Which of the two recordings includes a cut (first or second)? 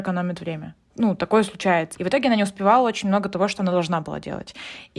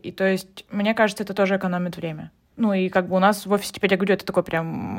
first